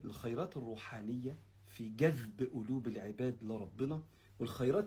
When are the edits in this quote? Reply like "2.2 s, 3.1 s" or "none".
1.5 s